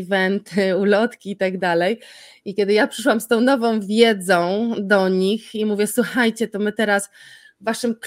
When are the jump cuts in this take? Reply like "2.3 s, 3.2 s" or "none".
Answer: none